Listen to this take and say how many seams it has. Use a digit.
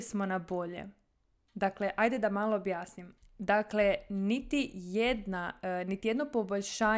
1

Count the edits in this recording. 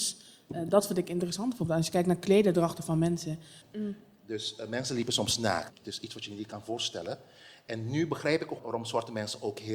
3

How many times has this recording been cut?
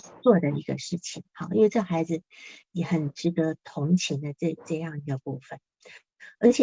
1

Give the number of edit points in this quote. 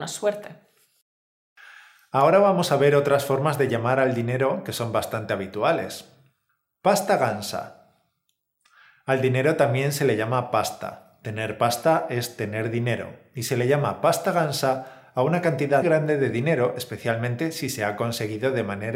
1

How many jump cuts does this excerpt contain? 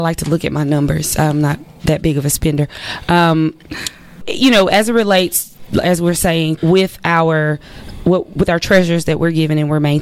2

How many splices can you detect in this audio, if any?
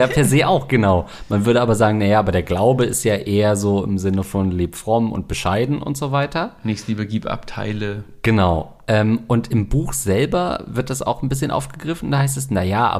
0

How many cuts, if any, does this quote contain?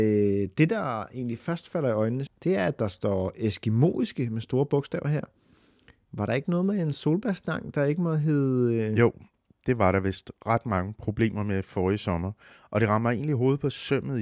1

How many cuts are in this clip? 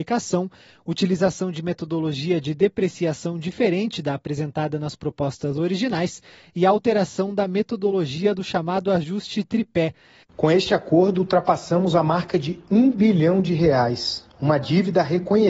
1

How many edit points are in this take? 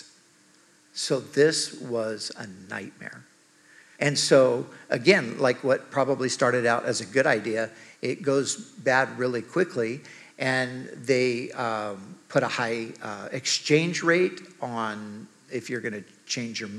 1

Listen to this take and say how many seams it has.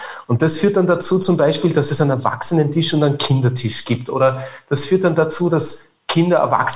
0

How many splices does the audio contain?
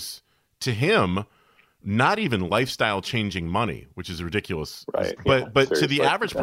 1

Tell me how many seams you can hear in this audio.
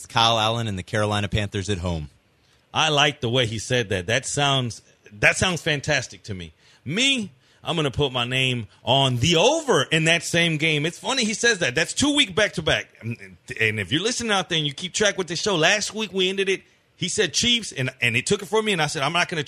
0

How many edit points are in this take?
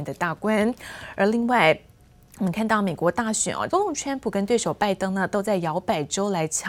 1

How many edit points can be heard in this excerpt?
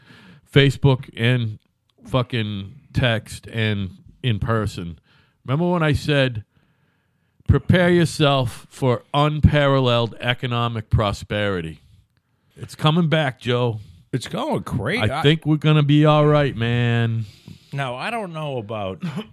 1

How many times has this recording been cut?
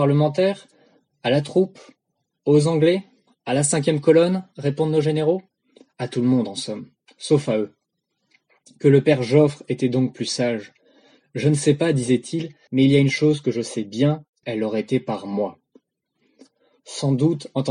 2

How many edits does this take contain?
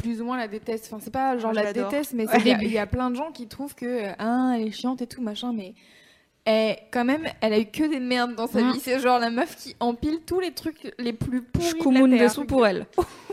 1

